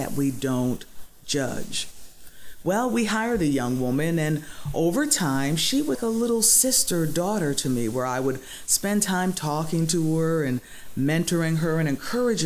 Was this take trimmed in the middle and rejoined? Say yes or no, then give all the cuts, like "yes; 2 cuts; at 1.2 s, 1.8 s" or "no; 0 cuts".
yes; 1 cut; at 5.9 s